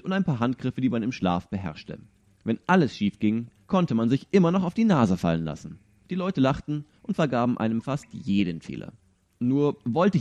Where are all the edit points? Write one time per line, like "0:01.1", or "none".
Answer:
none

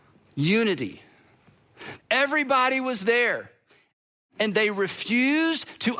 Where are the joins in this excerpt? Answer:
0:02.0

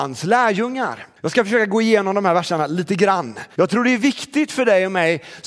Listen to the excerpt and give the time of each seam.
0:01.2
0:03.6

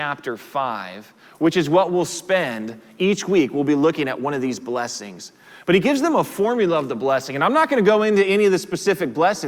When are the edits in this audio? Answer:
none

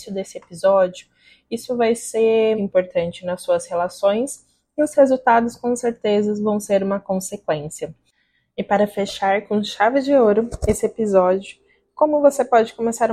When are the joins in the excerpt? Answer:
0:02.5

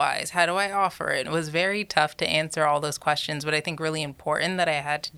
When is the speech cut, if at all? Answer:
0:01.2

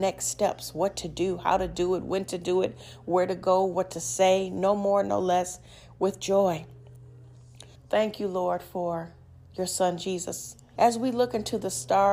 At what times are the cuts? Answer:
0:07.8
0:10.8

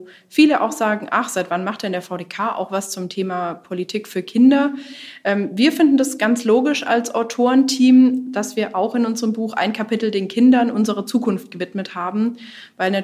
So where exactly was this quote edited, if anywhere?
none

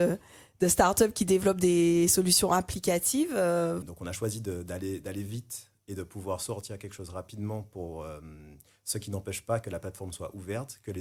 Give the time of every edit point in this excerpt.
0:03.8

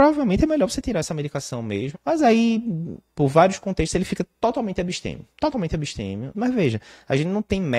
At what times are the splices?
0:01.9
0:03.1
0:06.3

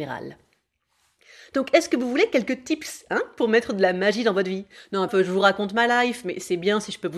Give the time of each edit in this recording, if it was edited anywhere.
0:05.1

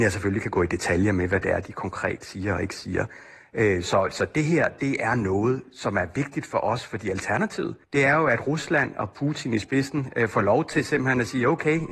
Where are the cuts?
0:07.8

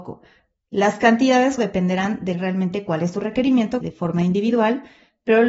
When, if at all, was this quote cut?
0:01.6
0:03.8

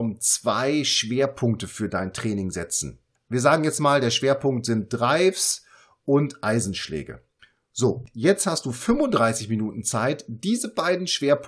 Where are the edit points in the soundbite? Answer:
none

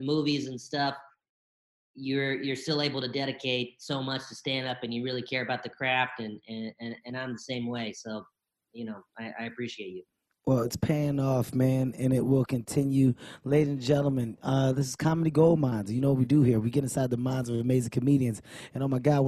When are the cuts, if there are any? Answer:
none

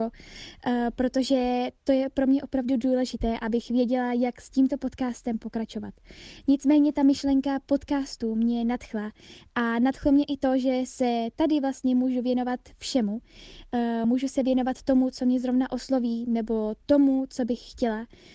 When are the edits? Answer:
none

